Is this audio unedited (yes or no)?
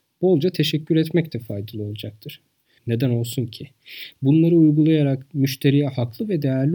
no